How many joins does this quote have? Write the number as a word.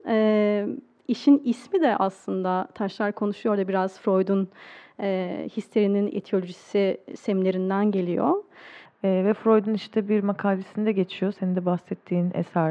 one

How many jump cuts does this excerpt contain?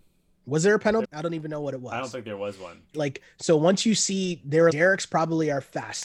three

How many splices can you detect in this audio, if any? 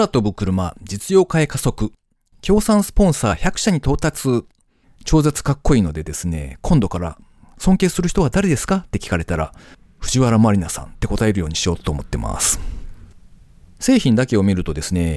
one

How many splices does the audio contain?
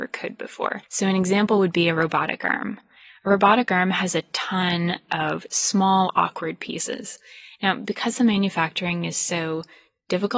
zero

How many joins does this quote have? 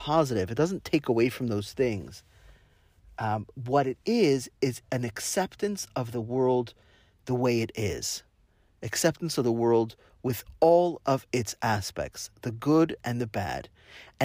zero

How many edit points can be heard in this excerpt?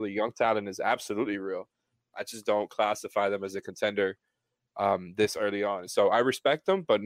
one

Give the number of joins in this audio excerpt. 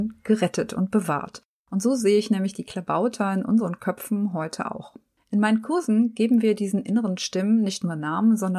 zero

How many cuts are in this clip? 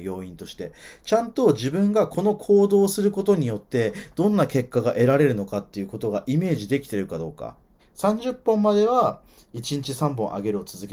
one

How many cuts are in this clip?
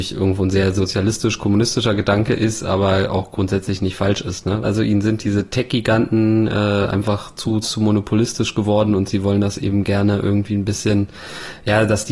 two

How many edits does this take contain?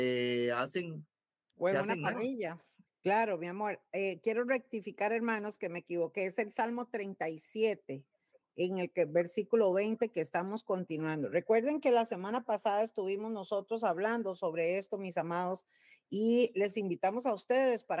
one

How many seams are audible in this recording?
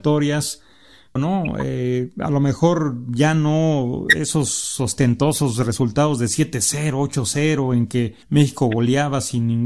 two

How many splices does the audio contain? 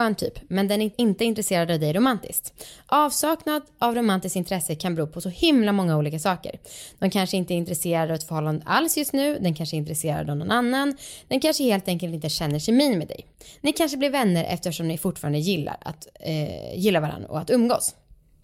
one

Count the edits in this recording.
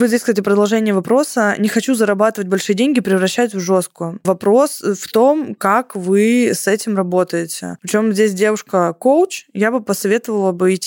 zero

